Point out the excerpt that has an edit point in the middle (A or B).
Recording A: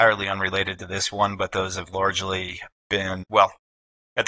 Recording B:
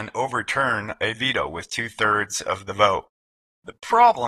A